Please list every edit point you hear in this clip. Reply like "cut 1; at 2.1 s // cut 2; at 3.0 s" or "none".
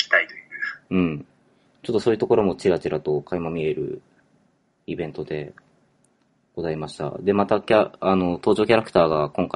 cut 1; at 1.7 s